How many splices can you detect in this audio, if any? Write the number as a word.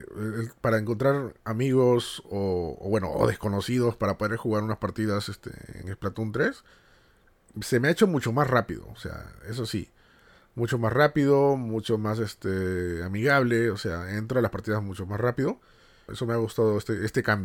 one